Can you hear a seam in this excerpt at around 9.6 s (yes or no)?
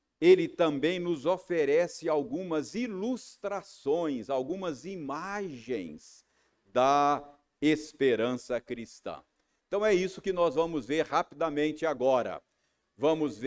no